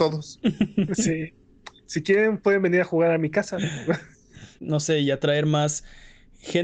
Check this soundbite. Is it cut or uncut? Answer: cut